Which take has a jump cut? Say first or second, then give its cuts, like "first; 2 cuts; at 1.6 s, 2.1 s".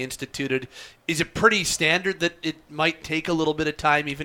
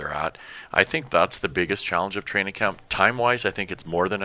first; 1 cut; at 1.0 s